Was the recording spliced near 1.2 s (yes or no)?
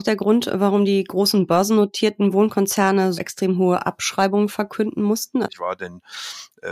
no